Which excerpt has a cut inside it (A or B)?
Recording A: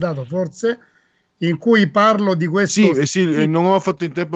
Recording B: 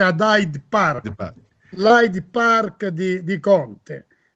B